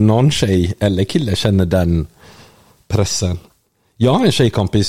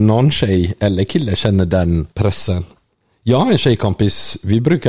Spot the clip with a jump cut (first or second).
second